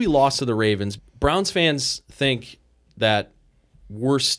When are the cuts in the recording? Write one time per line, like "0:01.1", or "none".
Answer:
0:01.0